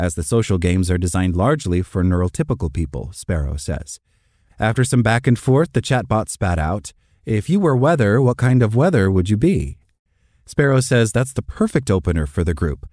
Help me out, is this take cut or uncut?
cut